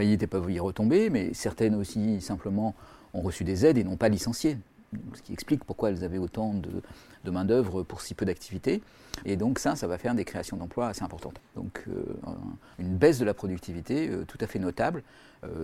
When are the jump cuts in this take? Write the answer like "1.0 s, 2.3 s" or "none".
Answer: 9.2 s, 11.4 s, 12.7 s